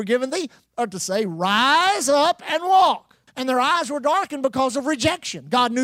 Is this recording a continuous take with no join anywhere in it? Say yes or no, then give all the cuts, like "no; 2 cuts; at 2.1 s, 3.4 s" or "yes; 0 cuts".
no; 1 cut; at 3.3 s